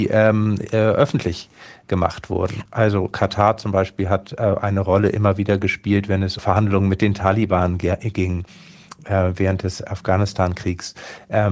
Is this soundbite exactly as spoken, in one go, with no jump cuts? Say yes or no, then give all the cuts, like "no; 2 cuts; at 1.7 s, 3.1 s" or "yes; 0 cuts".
no; 2 cuts; at 2.7 s, 6.4 s